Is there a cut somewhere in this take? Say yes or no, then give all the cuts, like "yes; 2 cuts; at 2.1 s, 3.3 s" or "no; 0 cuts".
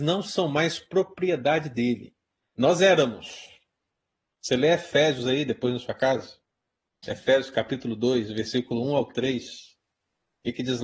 no; 0 cuts